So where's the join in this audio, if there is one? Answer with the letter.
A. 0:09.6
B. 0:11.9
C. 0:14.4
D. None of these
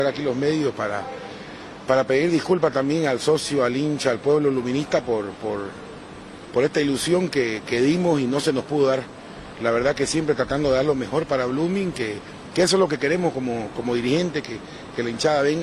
D